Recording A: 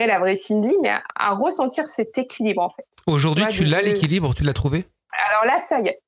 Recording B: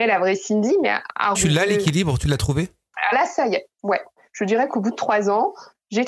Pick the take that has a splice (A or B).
B